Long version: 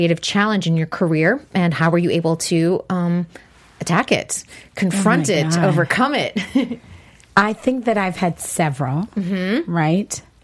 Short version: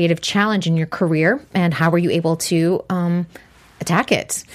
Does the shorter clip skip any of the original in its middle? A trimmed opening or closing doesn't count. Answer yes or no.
no